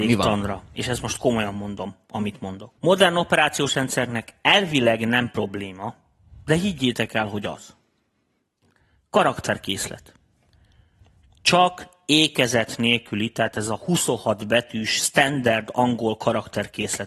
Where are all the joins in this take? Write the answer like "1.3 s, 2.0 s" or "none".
2.8 s